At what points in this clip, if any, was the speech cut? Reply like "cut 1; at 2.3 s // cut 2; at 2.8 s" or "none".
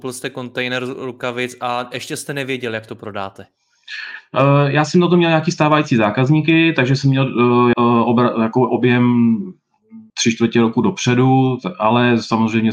cut 1; at 7.7 s // cut 2; at 10.1 s